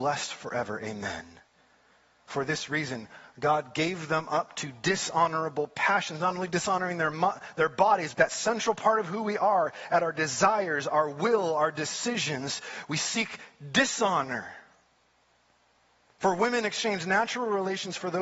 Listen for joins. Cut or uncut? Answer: cut